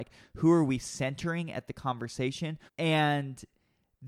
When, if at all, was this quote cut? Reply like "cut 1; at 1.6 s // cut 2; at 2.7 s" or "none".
cut 1; at 2.7 s